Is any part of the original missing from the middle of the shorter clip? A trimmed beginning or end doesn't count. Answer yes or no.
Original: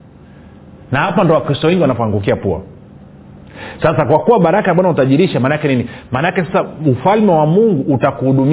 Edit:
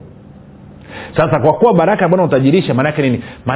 no